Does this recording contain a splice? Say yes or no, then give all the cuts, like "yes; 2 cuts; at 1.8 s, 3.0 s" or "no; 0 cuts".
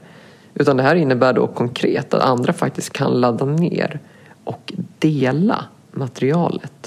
no; 0 cuts